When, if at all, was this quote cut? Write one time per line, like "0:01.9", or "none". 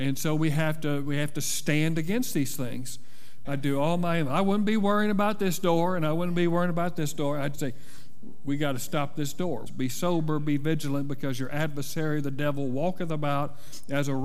0:03.4
0:07.5
0:09.7